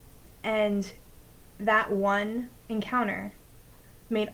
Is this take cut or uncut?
uncut